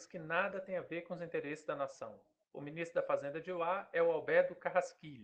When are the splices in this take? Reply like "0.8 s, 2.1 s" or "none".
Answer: 2.4 s